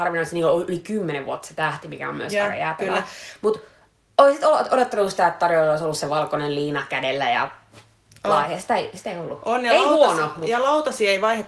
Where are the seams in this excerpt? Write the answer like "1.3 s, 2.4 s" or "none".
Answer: none